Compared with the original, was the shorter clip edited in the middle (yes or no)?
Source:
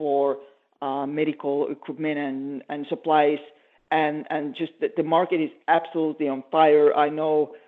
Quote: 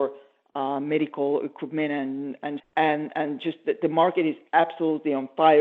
yes